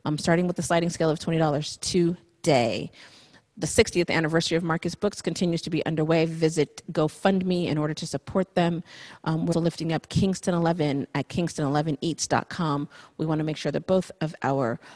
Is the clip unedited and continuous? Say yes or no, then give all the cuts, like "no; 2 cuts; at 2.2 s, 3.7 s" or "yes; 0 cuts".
no; 1 cut; at 9.5 s